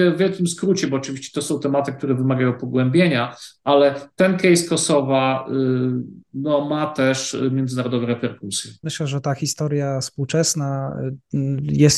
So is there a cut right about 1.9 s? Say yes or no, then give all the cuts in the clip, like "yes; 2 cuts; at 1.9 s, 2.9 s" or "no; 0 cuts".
no; 1 cut; at 8.8 s